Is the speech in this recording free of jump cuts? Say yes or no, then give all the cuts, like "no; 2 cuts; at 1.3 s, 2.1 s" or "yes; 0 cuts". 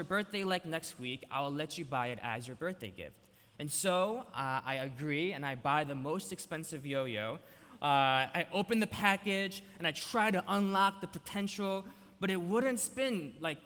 yes; 0 cuts